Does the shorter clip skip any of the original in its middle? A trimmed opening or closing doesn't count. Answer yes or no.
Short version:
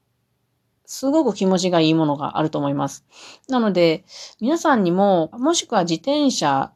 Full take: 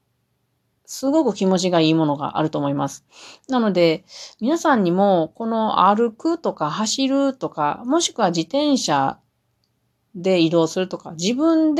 yes